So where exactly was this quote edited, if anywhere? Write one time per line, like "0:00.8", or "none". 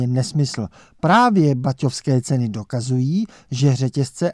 none